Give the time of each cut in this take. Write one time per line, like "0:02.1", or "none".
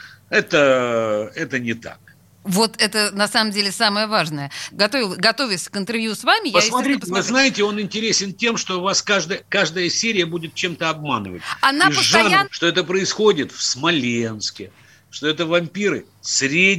0:02.4
0:04.7
0:12.4